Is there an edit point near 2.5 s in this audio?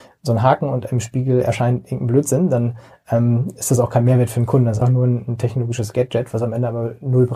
no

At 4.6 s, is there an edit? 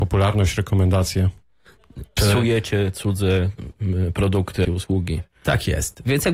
yes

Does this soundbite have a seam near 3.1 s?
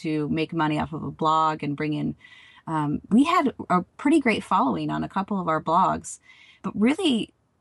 yes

